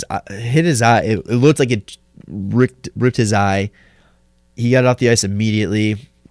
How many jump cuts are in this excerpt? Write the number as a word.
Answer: zero